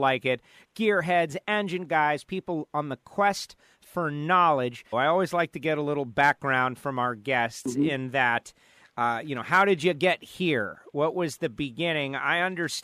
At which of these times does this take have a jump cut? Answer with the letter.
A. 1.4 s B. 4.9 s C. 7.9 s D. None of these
B